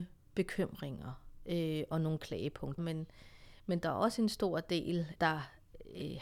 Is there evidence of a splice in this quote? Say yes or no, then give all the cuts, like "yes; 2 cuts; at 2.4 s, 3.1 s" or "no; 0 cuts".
yes; 2 cuts; at 2.8 s, 5.2 s